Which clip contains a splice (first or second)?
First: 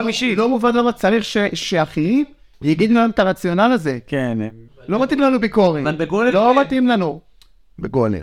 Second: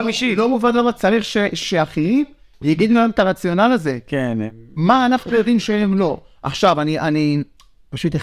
first